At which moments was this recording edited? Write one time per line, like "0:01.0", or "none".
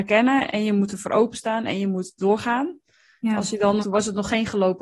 0:03.8